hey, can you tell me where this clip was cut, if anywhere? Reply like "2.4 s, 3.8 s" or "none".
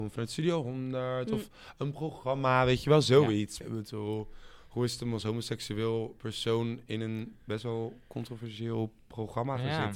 3.6 s